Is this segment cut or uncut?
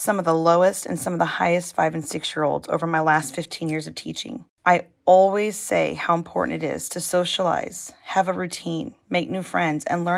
uncut